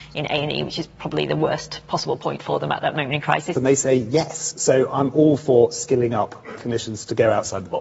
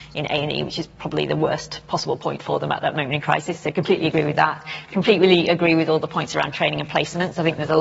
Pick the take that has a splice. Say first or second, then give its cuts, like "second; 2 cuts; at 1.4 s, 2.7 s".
first; 2 cuts; at 3.5 s, 6.5 s